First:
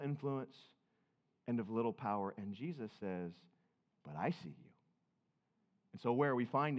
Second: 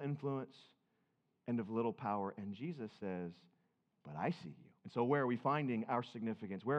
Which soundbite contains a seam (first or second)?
second